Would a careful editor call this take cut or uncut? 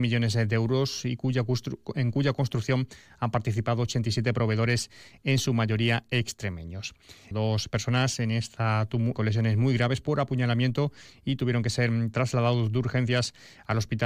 cut